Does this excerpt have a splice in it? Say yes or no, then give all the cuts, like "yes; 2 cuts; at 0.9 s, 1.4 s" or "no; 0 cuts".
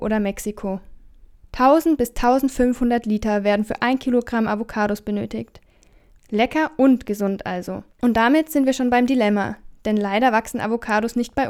yes; 3 cuts; at 1.4 s, 6.2 s, 7.9 s